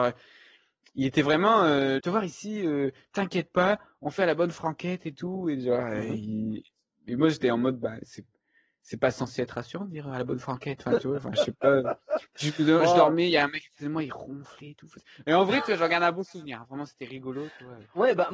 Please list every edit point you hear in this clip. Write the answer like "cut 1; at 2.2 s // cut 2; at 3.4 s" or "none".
cut 1; at 2.0 s